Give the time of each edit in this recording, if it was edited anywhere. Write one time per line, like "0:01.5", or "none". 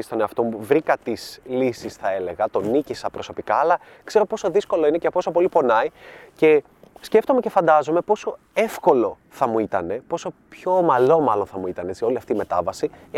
none